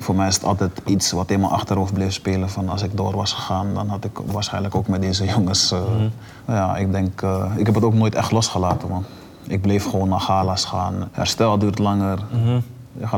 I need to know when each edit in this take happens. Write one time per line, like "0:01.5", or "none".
0:06.4
0:11.1